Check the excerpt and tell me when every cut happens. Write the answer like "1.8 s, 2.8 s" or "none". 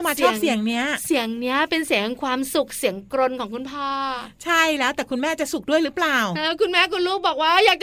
none